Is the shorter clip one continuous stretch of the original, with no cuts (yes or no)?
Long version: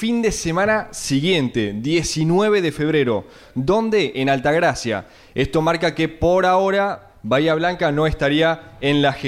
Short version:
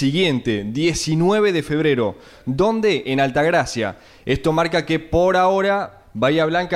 yes